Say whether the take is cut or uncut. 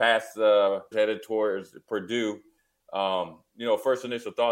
cut